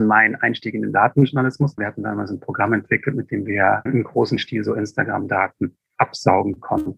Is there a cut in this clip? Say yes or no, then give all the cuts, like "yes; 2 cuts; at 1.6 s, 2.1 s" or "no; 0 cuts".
yes; 2 cuts; at 1.8 s, 3.9 s